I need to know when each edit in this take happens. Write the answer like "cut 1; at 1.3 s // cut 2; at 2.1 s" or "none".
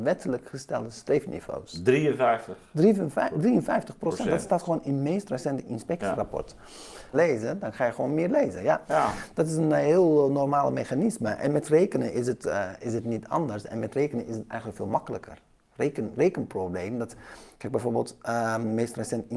cut 1; at 7.1 s